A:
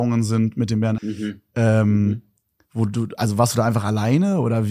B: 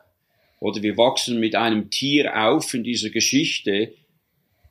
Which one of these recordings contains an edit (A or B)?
A